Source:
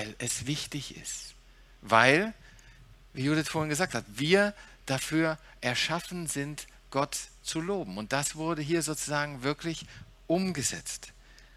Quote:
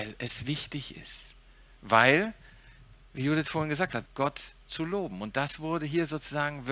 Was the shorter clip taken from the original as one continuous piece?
no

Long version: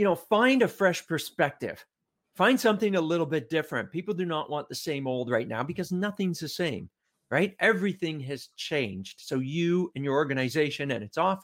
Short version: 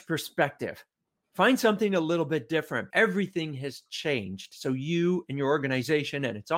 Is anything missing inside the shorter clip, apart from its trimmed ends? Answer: yes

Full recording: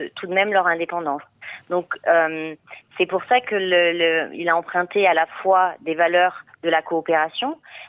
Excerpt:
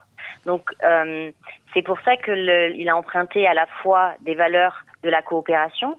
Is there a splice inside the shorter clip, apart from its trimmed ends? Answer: yes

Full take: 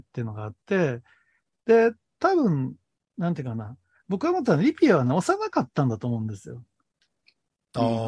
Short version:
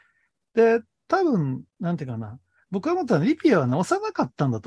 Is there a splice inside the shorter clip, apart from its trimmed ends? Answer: yes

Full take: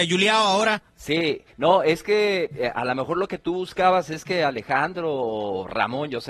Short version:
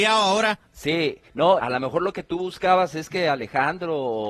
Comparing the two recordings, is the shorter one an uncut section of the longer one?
no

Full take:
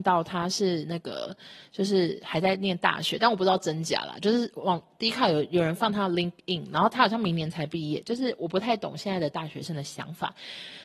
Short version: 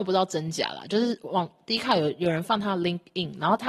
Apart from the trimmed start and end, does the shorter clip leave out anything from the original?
no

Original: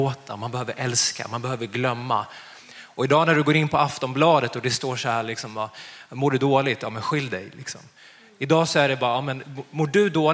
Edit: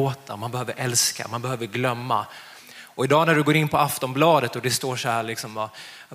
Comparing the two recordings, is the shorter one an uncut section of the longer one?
yes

